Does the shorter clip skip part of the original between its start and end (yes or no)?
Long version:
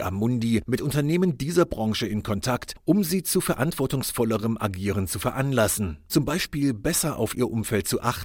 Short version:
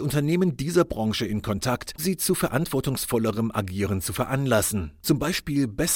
yes